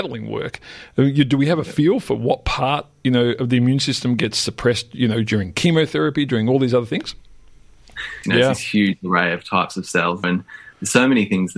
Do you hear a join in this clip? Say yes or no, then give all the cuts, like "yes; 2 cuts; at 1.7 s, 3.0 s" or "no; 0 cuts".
yes; 2 cuts; at 8.2 s, 10.2 s